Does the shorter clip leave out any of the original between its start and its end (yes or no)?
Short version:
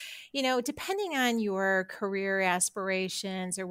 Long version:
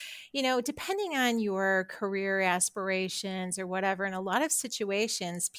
no